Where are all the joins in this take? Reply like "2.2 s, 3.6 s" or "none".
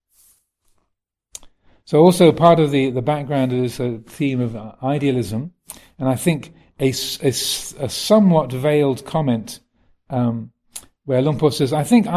none